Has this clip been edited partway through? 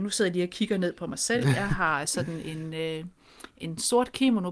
no; 0 cuts

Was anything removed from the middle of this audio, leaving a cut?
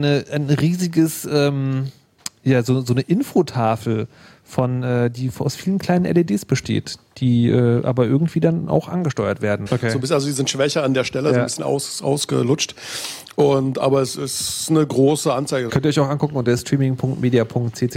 yes; 2 cuts; at 9.7 s, 15.7 s

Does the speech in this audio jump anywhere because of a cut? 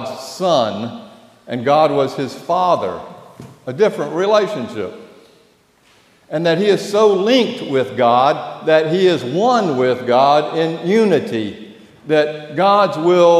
no; 0 cuts

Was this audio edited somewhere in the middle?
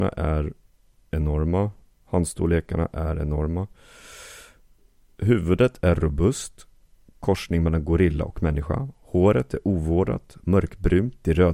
no; 0 cuts

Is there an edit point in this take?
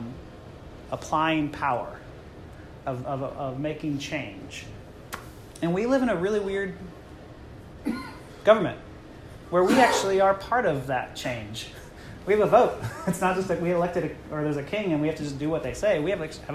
no; 0 cuts

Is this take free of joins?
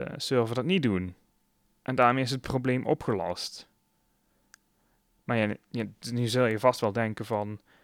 yes; 0 cuts

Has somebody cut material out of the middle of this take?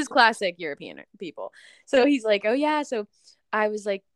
no; 0 cuts

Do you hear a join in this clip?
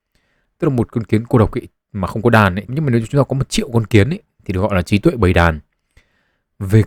yes; 2 cuts; at 2.7 s, 4.4 s

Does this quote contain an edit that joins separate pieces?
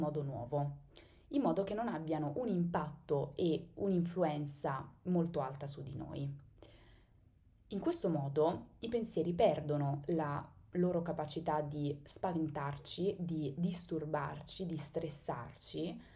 no; 0 cuts

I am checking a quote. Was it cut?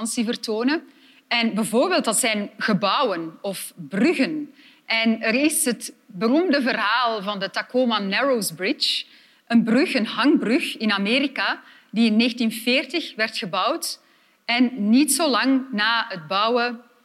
no; 0 cuts

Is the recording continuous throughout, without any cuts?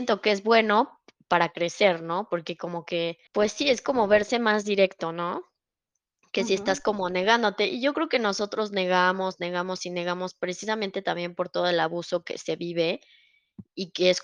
no; 1 cut; at 3.3 s

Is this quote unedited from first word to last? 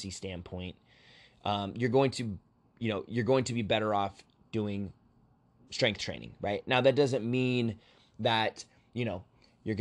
yes; 0 cuts

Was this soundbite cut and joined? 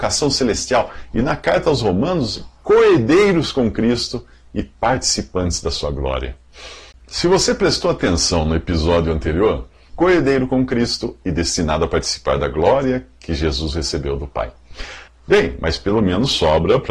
yes; 3 cuts; at 6.9 s, 9.9 s, 15.1 s

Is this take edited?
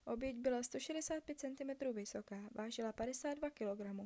no; 0 cuts

